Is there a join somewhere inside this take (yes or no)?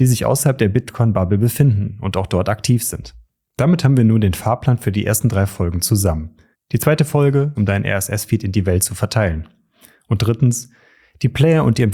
yes